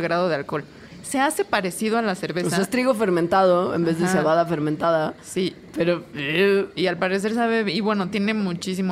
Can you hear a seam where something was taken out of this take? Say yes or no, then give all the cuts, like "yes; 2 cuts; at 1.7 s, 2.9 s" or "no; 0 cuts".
no; 0 cuts